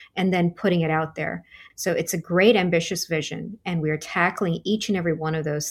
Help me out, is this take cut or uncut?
cut